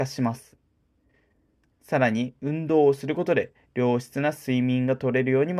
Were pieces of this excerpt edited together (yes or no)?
yes